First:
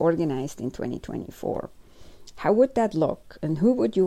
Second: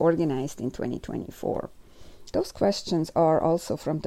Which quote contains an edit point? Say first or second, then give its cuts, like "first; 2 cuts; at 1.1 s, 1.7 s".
second; 1 cut; at 2.3 s